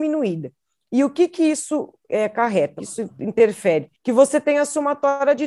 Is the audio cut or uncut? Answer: cut